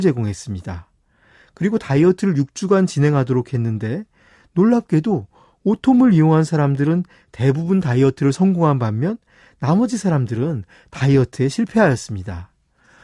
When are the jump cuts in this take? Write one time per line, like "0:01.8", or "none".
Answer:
none